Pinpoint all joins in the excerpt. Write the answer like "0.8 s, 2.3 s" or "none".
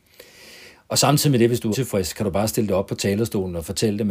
1.7 s